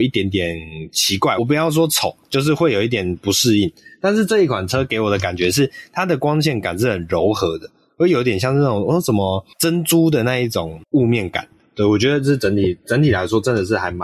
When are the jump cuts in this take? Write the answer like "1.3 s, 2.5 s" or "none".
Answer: 1.4 s